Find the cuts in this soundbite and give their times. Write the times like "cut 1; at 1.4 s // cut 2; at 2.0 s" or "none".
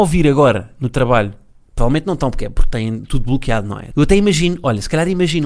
cut 1; at 3.9 s